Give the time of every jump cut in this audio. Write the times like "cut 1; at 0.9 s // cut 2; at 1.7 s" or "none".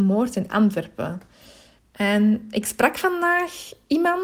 cut 1; at 1.8 s